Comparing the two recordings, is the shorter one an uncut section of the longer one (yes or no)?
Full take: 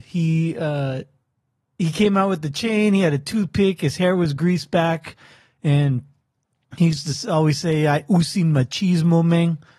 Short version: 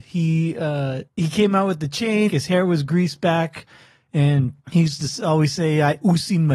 no